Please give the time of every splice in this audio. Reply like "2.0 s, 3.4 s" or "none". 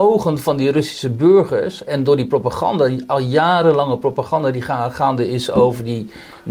none